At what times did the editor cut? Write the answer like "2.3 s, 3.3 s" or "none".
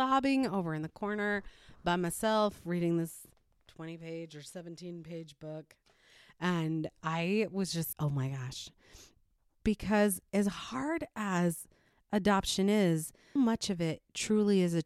7.9 s, 13.4 s